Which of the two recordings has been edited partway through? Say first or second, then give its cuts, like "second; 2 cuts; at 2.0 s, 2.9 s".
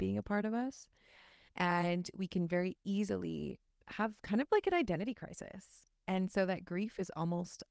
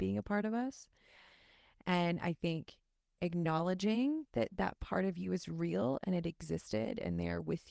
first; 1 cut; at 1.5 s